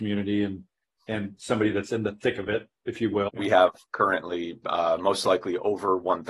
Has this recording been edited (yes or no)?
yes